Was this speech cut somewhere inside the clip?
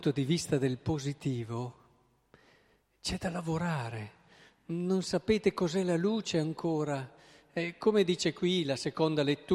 no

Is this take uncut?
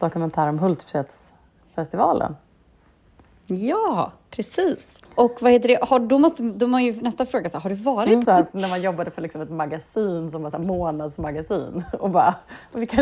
no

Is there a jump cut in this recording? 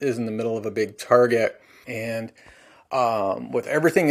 yes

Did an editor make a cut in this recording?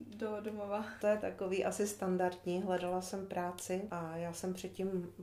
yes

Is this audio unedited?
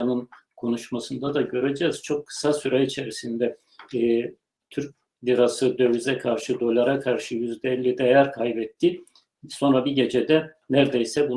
yes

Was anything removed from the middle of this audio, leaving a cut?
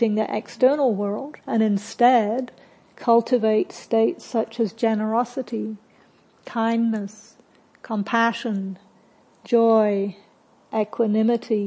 yes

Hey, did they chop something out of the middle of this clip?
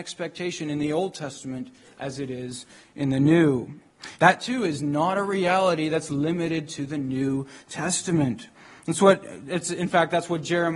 yes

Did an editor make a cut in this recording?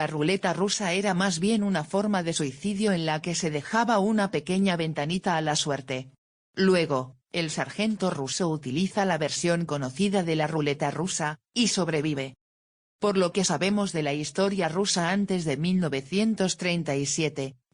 yes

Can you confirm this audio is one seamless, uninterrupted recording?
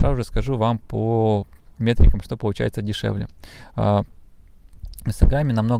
yes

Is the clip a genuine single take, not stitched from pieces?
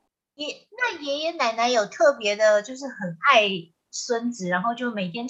yes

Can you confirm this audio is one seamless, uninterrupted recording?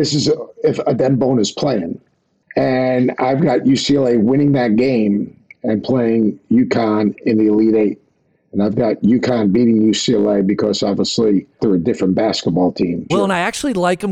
no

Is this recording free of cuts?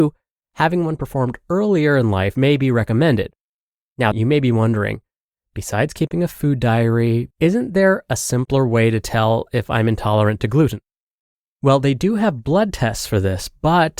no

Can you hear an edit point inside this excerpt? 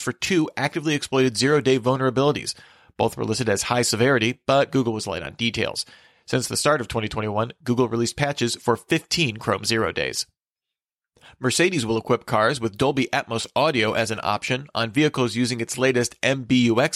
no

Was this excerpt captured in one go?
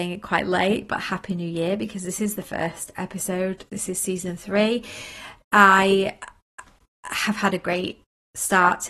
yes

